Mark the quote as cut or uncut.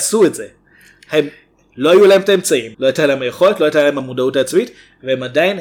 cut